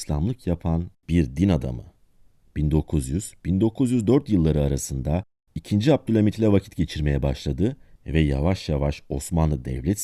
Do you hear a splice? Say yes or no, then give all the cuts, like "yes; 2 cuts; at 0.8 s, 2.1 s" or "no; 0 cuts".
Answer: yes; 1 cut; at 2.4 s